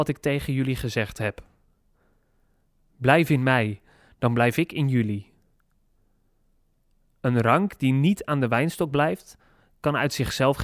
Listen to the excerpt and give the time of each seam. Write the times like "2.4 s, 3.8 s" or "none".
none